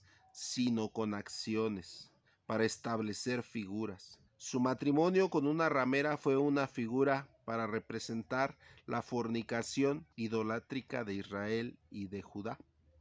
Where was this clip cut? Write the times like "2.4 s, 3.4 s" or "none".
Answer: 4.3 s, 10.1 s